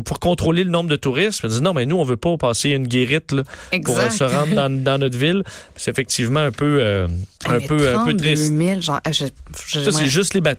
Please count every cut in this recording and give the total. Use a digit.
1